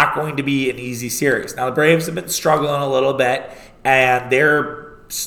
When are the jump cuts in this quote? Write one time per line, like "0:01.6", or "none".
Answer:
none